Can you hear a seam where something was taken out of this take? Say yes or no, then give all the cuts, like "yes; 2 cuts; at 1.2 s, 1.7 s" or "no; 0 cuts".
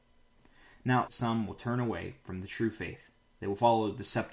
yes; 1 cut; at 1.1 s